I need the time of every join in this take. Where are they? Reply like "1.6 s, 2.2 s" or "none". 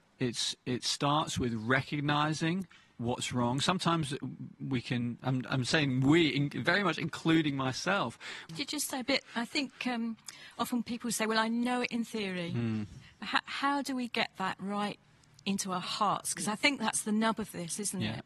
5.2 s, 8.5 s